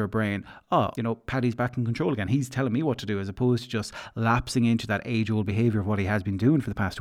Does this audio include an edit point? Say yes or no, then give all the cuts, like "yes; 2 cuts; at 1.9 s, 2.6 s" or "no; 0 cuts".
yes; 1 cut; at 0.9 s